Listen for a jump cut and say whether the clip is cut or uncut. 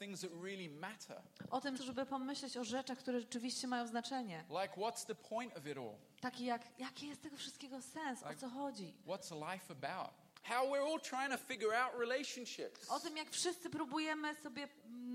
cut